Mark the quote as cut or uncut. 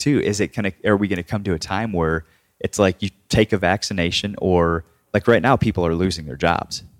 uncut